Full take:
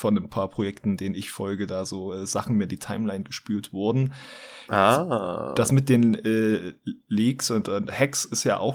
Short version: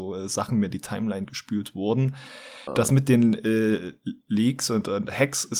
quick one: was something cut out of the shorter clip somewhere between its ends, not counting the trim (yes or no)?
yes